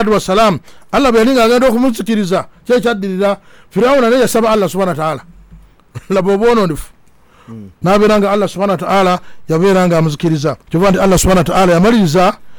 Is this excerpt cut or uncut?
cut